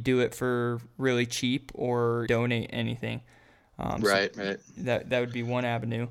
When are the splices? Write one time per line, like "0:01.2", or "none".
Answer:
0:02.3